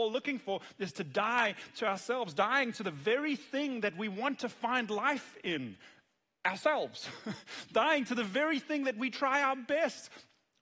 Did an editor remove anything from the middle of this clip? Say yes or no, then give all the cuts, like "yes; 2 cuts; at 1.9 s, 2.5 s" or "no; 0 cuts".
no; 0 cuts